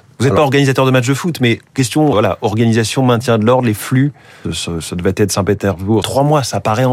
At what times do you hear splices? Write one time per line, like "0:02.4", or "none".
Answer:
0:02.1
0:04.4
0:06.0